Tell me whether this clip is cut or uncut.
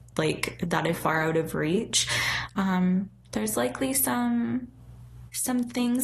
cut